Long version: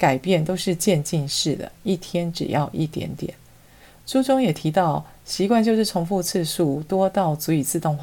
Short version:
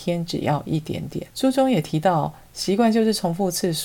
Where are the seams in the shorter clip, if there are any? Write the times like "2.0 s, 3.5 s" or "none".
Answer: 1.3 s